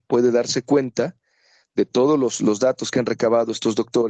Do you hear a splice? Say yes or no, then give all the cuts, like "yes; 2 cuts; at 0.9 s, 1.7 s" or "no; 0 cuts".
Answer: no; 0 cuts